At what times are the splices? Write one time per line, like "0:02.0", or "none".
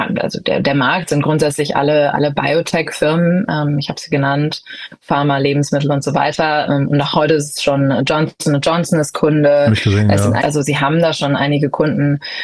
0:10.4